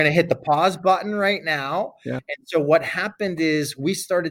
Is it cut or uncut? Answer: uncut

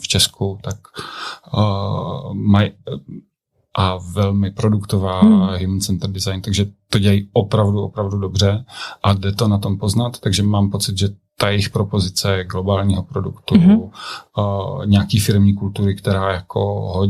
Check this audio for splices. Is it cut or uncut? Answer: uncut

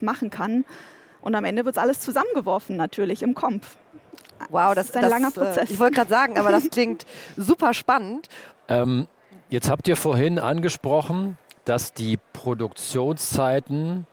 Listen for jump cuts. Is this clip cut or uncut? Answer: cut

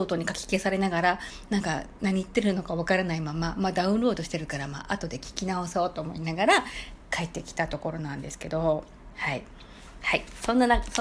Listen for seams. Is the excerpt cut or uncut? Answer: uncut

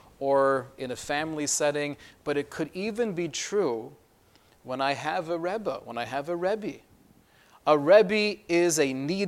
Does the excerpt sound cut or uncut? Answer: uncut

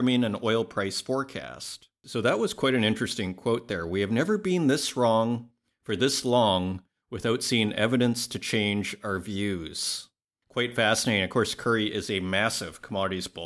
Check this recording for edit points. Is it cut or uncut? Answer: uncut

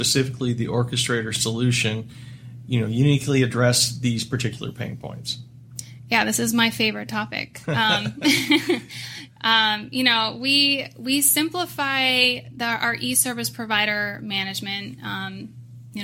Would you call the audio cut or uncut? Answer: uncut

